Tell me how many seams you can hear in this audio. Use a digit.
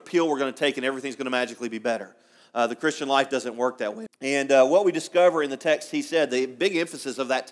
1